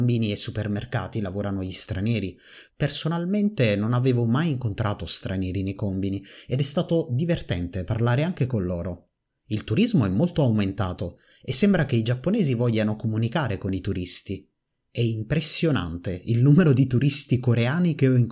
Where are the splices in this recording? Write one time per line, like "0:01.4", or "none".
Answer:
0:02.7
0:09.3